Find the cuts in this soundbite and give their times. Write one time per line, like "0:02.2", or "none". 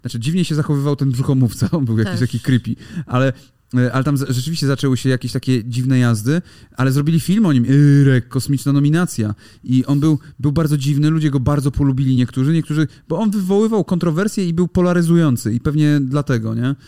none